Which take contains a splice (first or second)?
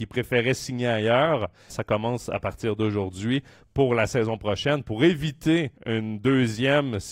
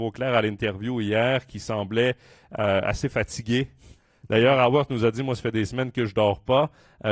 first